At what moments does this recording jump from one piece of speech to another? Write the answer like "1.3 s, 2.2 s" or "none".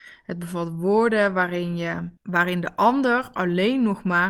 2.2 s